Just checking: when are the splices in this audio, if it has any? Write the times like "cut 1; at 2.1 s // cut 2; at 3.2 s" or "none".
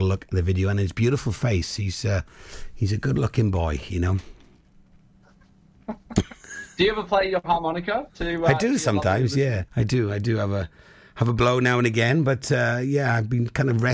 cut 1; at 9.7 s